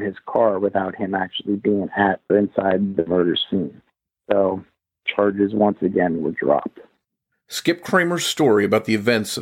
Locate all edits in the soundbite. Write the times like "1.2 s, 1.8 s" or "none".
2.3 s